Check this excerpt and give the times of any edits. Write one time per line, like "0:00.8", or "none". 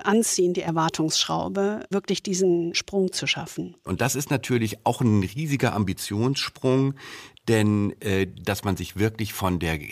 0:01.9
0:08.4